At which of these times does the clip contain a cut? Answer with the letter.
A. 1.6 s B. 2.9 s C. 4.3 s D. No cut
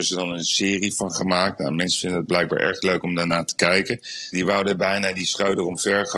C